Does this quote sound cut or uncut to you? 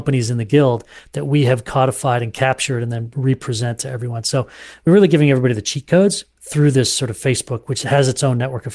uncut